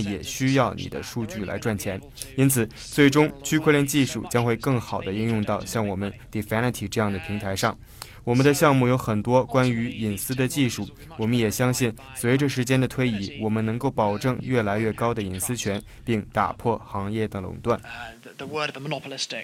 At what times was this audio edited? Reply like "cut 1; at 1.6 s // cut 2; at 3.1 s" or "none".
none